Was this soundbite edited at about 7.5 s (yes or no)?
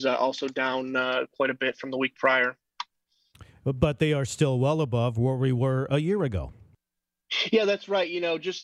no